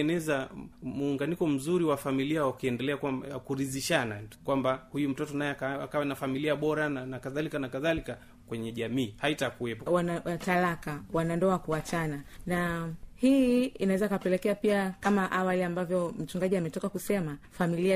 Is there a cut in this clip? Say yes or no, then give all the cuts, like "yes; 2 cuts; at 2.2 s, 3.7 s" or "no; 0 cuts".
yes; 1 cut; at 9.9 s